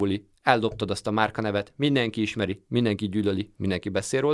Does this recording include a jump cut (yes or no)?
no